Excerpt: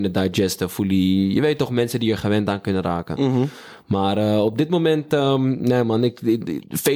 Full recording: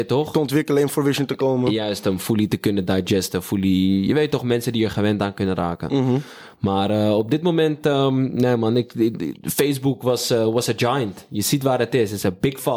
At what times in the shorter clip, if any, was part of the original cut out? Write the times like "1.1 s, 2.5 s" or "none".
none